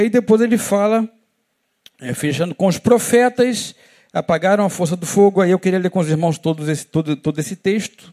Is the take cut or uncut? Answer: uncut